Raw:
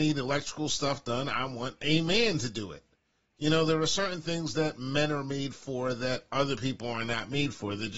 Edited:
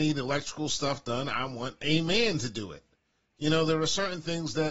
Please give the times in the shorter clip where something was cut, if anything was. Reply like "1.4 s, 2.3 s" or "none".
none